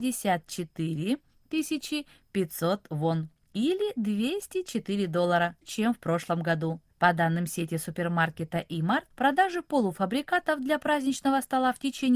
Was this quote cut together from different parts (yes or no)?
yes